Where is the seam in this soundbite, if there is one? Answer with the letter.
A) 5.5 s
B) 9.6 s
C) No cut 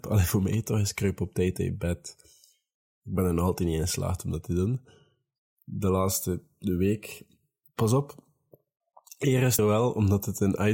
B